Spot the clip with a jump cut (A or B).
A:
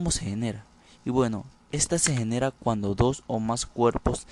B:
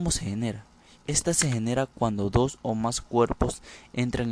B